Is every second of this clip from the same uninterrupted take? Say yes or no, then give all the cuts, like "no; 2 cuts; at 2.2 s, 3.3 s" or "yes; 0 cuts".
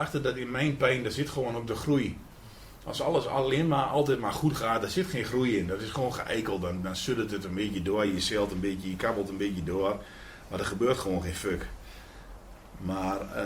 yes; 0 cuts